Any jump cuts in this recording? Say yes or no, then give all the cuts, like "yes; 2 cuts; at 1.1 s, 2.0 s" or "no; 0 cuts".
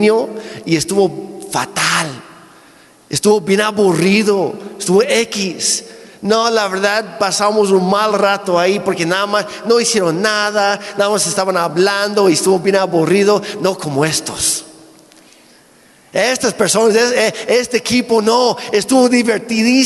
no; 0 cuts